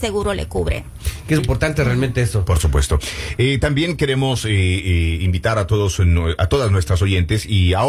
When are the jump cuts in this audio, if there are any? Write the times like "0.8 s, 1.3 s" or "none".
1.4 s